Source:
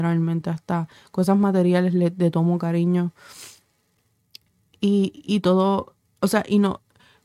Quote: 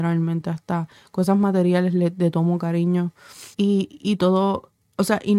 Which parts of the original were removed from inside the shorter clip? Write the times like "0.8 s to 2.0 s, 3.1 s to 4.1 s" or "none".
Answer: 3.5 s to 4.8 s